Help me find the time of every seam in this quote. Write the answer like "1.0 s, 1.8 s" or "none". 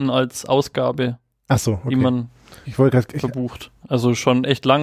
2.6 s, 3.8 s